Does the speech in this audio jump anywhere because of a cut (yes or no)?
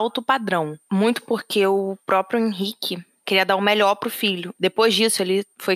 yes